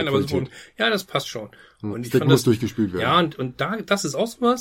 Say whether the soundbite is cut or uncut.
cut